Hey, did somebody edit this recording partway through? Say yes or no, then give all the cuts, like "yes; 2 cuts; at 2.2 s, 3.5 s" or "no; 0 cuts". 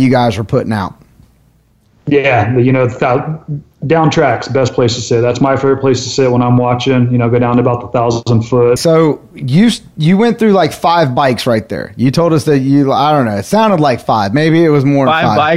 yes; 1 cut; at 8.8 s